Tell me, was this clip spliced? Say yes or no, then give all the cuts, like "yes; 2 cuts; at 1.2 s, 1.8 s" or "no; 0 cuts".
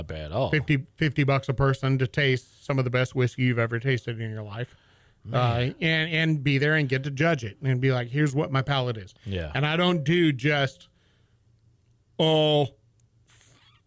no; 0 cuts